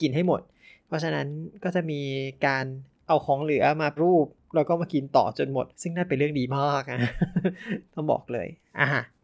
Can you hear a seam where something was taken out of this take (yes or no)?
yes